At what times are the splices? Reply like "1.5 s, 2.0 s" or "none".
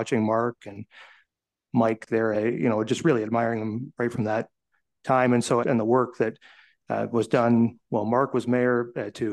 2.3 s, 5.6 s

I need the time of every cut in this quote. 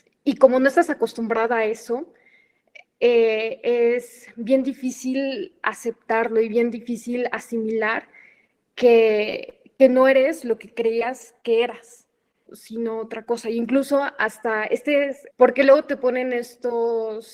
12.5 s, 15.3 s

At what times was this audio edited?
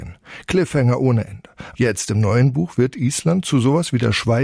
1.7 s

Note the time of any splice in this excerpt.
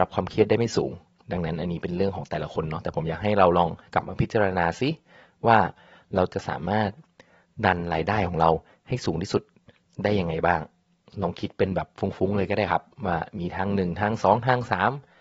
none

